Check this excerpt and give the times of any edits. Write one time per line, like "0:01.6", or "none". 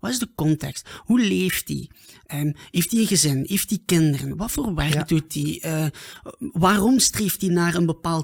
none